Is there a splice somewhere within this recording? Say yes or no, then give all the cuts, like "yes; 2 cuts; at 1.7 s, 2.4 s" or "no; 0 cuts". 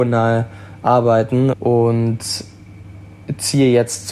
yes; 1 cut; at 1.5 s